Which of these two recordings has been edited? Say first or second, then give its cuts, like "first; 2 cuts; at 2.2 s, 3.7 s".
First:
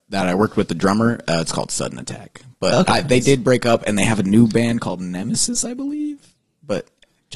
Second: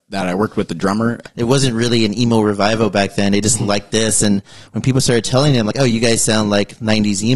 second; 1 cut; at 1.2 s